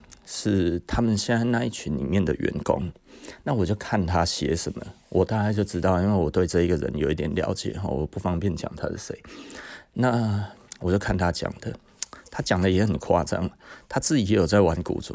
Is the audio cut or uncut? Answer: uncut